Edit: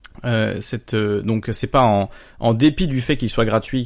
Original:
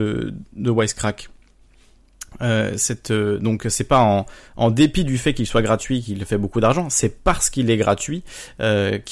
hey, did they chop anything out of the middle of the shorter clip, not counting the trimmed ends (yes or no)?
no